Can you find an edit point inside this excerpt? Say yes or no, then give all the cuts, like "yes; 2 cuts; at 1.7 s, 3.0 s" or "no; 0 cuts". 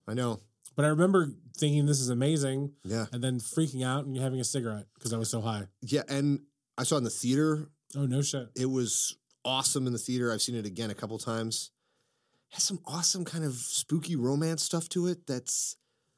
no; 0 cuts